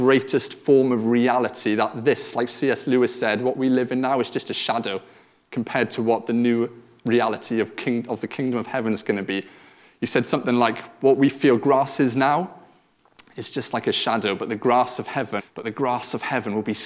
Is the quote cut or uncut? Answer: cut